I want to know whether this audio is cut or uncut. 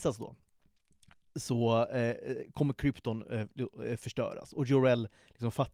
uncut